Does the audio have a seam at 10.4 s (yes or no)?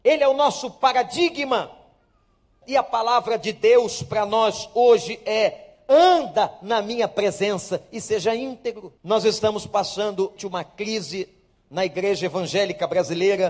yes